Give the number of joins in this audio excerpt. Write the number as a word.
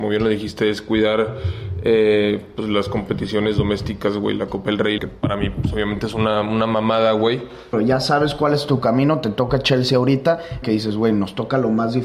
three